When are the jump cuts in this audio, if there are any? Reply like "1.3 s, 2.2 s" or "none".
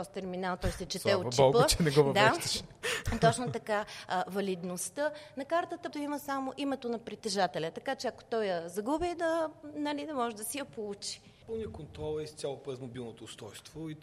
5.9 s, 11.4 s